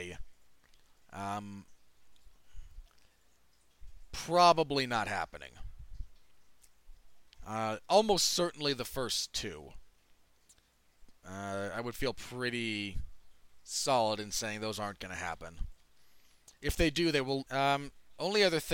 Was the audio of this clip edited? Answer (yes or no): yes